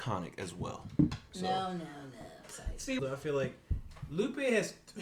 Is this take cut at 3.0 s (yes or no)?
yes